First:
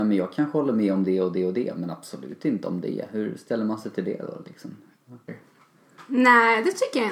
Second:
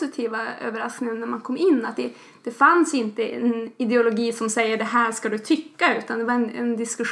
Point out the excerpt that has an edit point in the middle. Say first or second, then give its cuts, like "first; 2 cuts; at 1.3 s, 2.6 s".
first; 1 cut; at 5.3 s